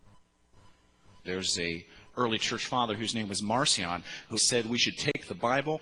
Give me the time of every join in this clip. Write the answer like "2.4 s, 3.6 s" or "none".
1.2 s, 4.4 s